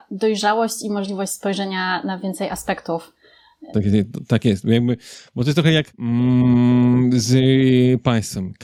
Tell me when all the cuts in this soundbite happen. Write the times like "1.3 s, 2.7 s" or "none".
3.7 s, 5.9 s